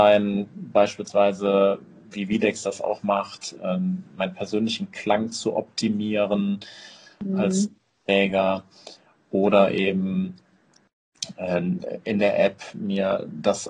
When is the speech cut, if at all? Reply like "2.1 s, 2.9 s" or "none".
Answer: 4.1 s